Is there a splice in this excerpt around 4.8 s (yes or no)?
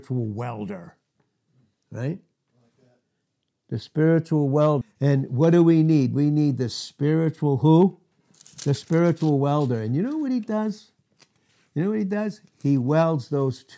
yes